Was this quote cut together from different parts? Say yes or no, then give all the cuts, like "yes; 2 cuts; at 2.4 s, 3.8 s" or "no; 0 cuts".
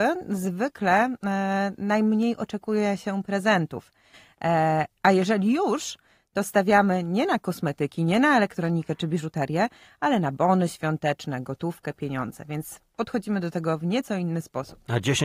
no; 0 cuts